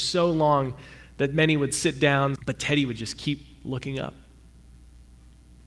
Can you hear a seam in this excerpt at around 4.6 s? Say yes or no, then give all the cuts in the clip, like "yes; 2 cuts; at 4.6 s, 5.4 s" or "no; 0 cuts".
no; 1 cut; at 2.4 s